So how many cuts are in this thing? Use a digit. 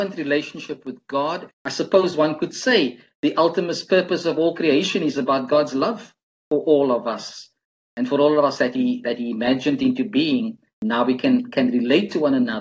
1